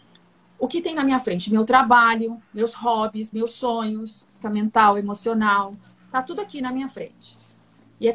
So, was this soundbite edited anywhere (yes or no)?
yes